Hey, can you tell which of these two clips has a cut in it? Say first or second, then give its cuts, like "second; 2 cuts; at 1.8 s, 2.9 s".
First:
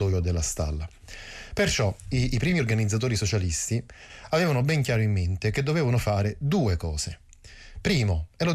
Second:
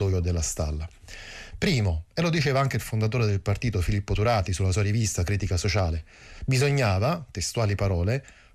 second; 1 cut; at 1.5 s